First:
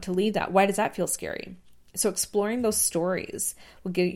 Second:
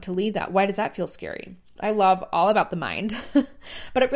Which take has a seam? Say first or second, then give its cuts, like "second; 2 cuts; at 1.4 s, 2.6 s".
second; 1 cut; at 1.8 s